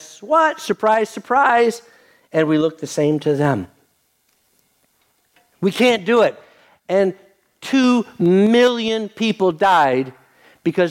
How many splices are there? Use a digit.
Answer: 0